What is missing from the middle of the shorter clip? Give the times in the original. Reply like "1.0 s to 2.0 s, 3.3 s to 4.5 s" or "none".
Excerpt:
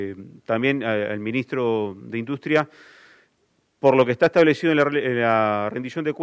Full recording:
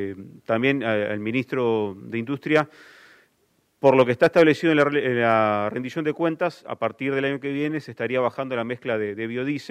none